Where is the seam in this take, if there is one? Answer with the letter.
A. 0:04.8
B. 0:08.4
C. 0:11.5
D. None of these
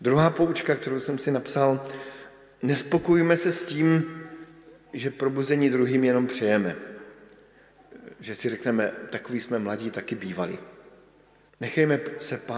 C